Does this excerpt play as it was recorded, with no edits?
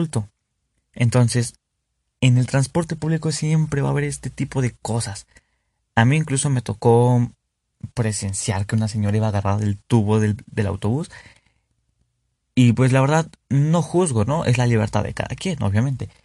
yes; 0 cuts

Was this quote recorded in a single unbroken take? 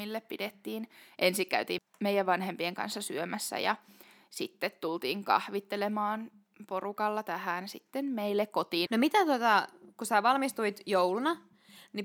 no; 2 cuts; at 1.8 s, 8.9 s

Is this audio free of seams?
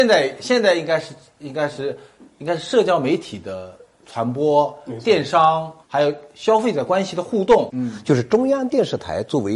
no; 2 cuts; at 5.8 s, 7.7 s

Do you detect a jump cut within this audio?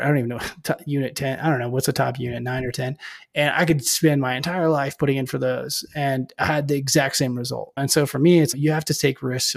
no; 0 cuts

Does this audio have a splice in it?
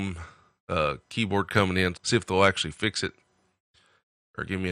yes; 1 cut; at 1.9 s

